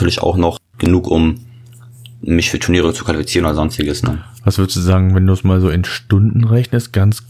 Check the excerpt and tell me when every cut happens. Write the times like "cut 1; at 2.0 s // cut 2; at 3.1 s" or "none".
none